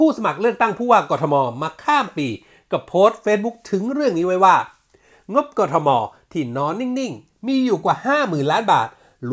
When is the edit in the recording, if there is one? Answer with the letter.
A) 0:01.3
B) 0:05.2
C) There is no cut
C